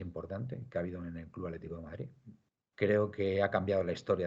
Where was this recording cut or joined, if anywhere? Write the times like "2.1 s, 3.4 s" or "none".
2.7 s